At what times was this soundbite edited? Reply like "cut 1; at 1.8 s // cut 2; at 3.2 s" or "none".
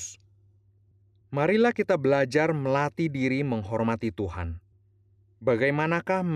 cut 1; at 1.2 s